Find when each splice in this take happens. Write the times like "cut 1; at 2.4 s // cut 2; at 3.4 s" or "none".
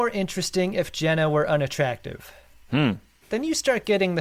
cut 1; at 3.2 s